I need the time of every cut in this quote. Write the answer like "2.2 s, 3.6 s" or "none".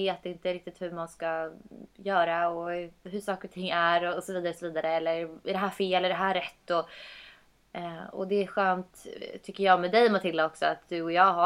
none